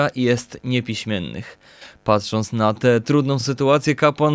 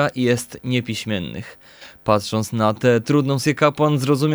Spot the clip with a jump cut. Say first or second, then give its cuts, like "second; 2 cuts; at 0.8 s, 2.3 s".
second; 1 cut; at 3.4 s